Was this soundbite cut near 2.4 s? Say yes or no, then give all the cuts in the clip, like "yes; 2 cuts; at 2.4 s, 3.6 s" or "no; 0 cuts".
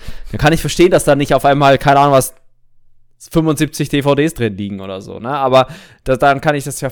no; 0 cuts